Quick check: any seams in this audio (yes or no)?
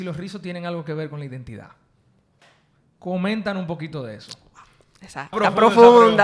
yes